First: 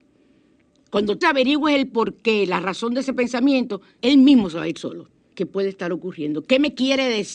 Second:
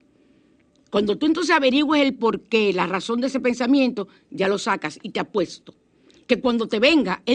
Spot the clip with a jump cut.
first; 3 cuts; at 1.2 s, 4.0 s, 5.3 s

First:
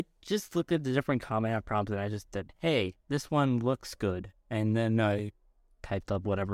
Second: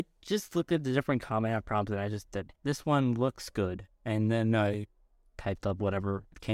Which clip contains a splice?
second; 1 cut; at 2.5 s

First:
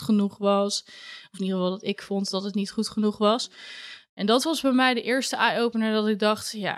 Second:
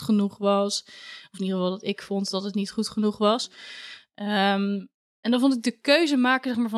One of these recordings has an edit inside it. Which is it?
first; 1 cut; at 4.1 s

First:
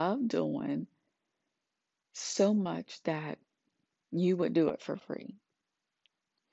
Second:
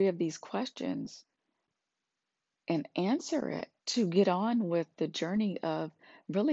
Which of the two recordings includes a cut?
second; 1 cut; at 3.8 s

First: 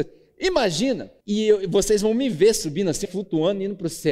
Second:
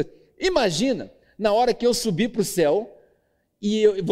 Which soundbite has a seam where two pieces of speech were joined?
first; 2 cuts; at 1.2 s, 3.0 s

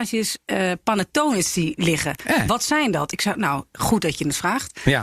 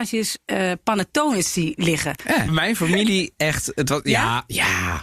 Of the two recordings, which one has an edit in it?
second; 1 cut; at 2.5 s

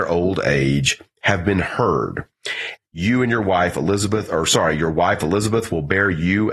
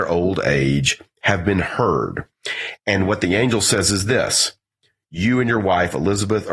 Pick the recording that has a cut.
first; 1 cut; at 2.8 s

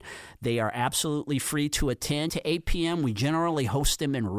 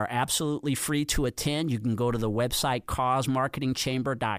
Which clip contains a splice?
first; 1 cut; at 2.3 s

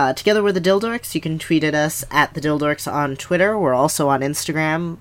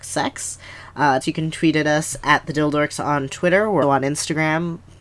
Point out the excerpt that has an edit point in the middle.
second; 2 cuts; at 1.2 s, 3.8 s

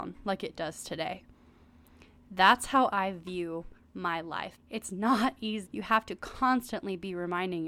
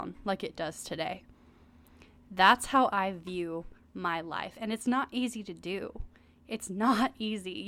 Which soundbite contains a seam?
first; 2 cuts; at 4.6 s, 5.7 s

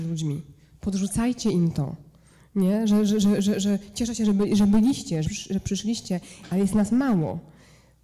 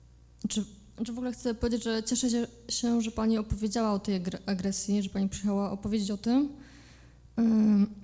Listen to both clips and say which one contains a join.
first; 1 cut; at 5.2 s

